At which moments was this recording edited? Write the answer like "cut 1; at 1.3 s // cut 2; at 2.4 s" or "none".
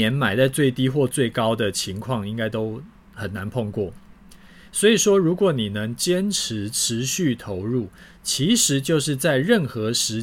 cut 1; at 4.7 s